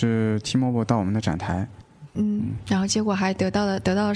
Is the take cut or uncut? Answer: cut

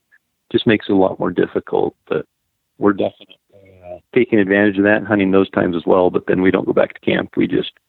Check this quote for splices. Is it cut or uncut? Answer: cut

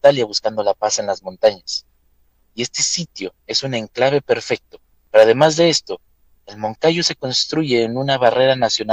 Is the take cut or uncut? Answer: cut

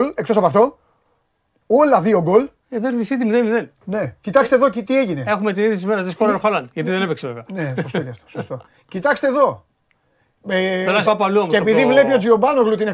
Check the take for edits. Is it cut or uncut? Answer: cut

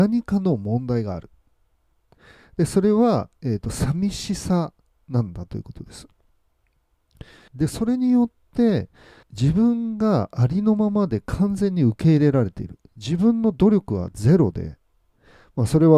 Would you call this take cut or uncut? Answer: cut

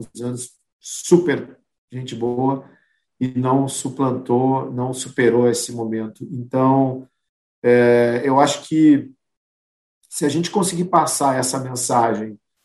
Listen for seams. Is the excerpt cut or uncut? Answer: uncut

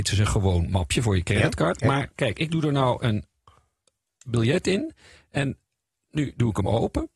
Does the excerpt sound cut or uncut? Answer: uncut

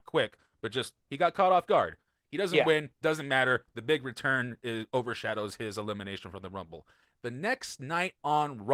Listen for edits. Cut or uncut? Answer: uncut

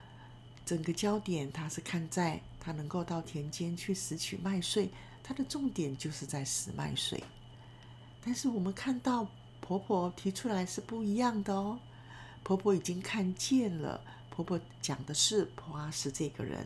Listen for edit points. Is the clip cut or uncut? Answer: uncut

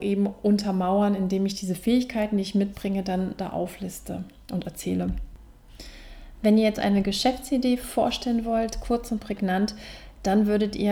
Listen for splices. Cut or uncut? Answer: uncut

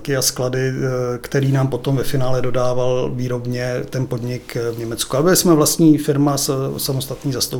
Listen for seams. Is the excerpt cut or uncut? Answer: uncut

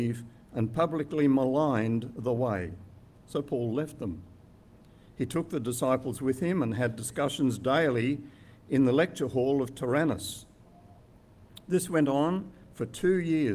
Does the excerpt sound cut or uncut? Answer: uncut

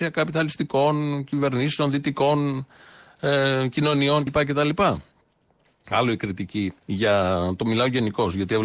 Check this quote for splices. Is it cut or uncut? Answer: cut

